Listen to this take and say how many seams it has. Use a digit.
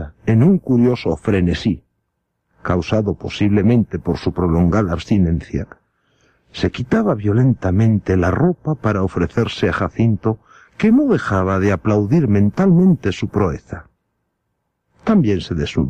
0